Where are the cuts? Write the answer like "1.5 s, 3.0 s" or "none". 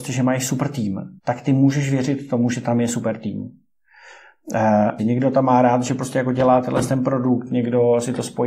1.2 s, 5.0 s